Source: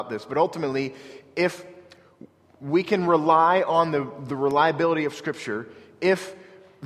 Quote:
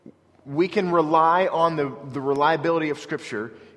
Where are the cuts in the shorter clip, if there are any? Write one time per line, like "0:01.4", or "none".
none